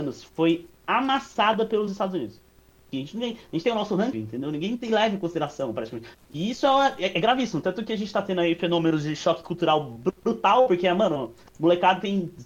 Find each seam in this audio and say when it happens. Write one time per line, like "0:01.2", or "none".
0:02.9
0:04.1
0:06.1